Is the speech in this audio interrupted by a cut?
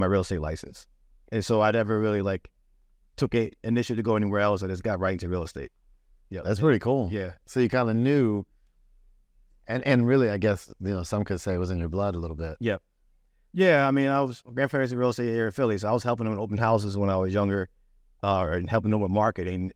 no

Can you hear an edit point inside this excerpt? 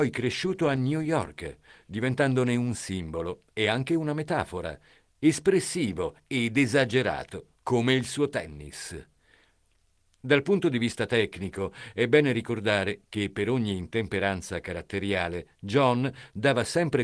no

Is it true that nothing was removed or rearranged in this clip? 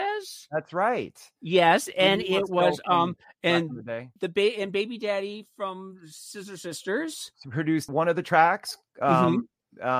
no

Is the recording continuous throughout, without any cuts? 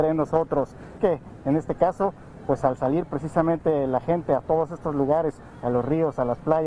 no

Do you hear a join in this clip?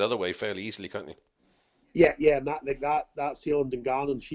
no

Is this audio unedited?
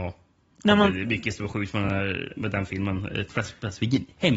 yes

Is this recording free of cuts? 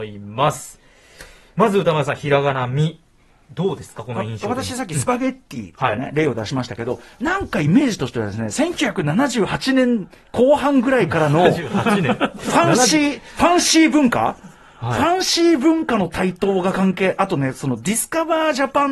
yes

